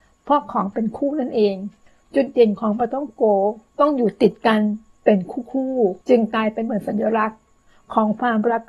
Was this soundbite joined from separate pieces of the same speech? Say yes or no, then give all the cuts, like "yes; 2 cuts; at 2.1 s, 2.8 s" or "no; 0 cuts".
yes; 2 cuts; at 3.7 s, 6.0 s